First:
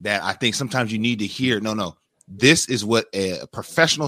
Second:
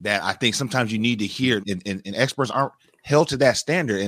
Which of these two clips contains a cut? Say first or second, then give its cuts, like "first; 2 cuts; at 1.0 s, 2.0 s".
second; 1 cut; at 1.6 s